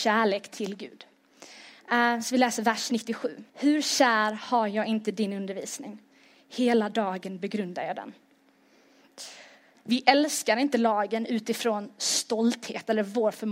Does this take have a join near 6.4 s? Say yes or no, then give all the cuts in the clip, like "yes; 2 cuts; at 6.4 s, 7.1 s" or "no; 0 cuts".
no; 2 cuts; at 3.5 s, 9.7 s